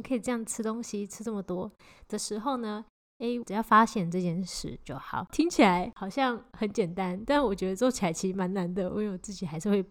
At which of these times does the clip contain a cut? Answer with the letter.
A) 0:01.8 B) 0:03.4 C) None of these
B